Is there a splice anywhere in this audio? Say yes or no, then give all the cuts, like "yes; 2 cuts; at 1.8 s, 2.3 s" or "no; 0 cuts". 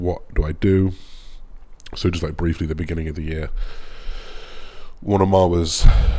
no; 0 cuts